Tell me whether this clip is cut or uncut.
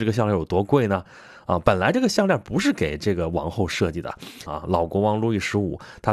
cut